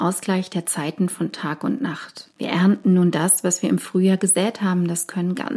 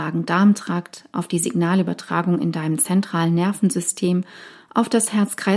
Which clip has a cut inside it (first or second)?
first